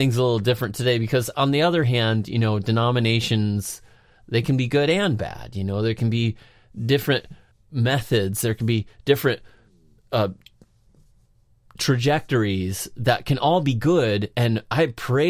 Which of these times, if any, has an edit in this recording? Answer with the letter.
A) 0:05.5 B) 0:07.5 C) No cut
B